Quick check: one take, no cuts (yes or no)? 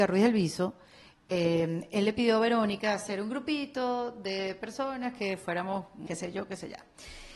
no